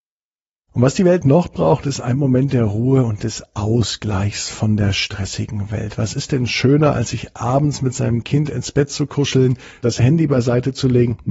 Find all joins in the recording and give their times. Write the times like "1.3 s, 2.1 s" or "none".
9.8 s